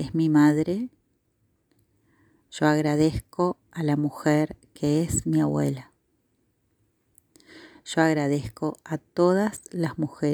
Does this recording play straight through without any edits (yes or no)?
yes